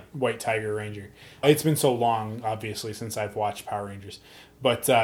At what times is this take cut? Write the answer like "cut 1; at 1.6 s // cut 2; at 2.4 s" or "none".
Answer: cut 1; at 1.4 s